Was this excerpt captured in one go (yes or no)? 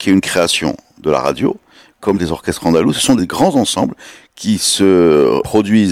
yes